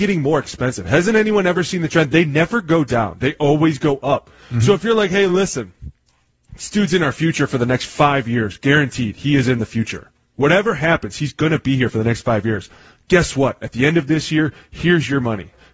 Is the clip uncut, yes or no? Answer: yes